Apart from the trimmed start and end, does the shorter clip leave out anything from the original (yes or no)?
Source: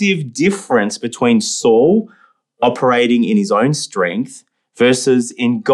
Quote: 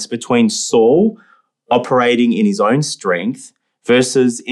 no